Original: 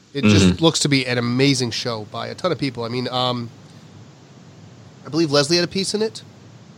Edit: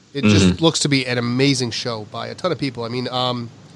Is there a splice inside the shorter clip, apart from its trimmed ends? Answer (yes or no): no